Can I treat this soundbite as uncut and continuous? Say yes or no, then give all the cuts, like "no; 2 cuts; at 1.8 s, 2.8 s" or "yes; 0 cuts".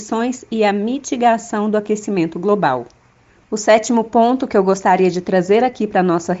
yes; 0 cuts